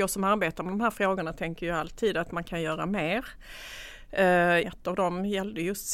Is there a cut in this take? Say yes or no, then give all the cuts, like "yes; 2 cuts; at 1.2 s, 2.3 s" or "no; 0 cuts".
yes; 1 cut; at 4.6 s